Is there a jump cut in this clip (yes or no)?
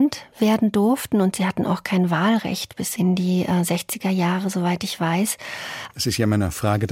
yes